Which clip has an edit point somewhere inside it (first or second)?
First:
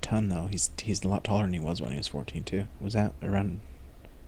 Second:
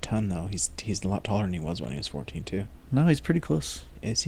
first